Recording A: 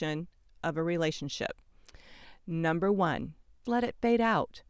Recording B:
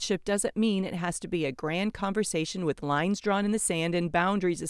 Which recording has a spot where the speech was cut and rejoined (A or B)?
A